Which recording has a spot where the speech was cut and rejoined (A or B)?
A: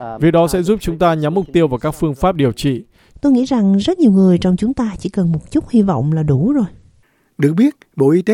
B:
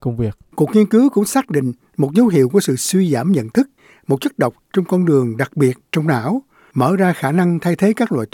A